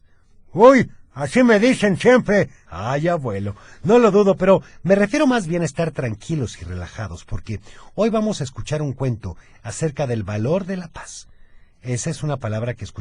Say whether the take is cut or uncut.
cut